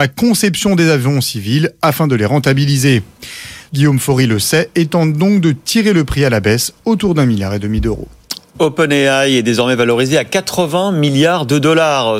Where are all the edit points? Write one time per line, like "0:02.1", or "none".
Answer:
0:03.7